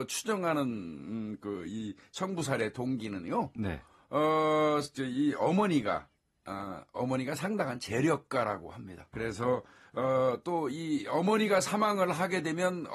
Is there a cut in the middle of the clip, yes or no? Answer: yes